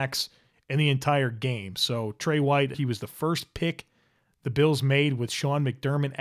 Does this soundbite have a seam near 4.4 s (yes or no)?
no